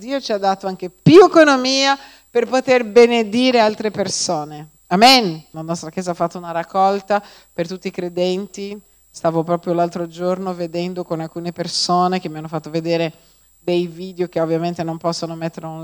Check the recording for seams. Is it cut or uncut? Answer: cut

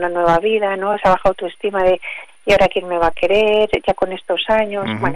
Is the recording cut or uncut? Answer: uncut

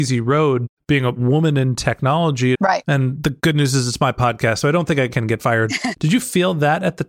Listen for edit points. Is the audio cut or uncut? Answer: cut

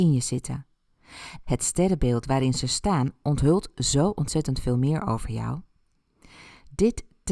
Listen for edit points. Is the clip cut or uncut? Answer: cut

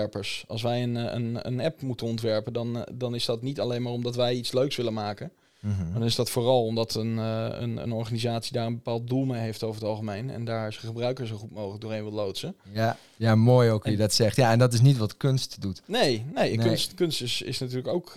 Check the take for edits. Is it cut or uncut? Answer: uncut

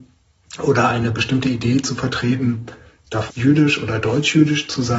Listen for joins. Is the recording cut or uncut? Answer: cut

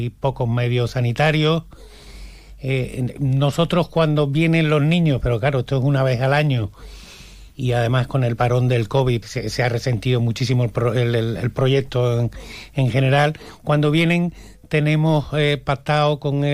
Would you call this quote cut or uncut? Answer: cut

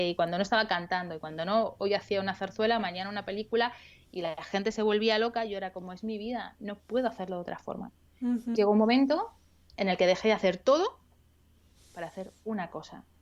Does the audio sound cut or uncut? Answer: cut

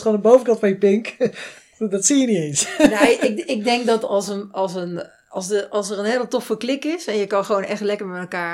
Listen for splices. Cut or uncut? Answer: uncut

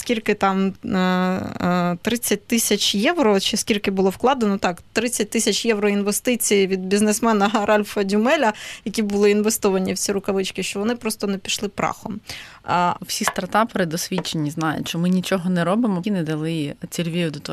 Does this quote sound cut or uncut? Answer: cut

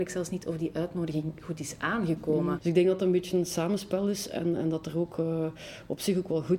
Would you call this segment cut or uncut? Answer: cut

